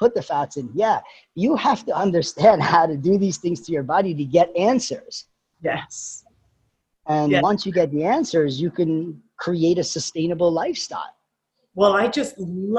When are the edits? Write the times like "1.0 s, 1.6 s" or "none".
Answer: none